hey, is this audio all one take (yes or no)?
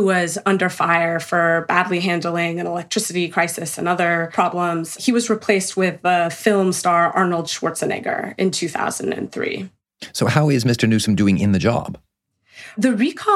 yes